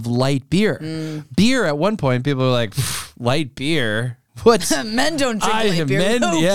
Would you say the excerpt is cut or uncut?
uncut